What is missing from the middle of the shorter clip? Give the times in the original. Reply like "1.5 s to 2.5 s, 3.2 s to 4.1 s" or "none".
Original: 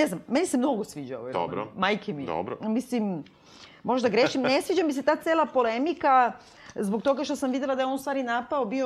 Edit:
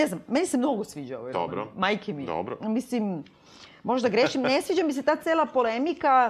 none